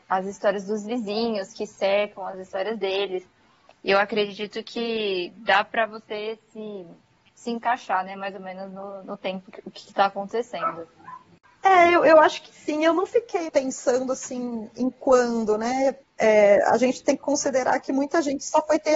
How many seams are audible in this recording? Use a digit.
2